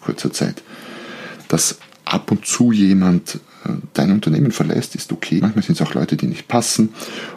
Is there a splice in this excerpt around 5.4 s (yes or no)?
yes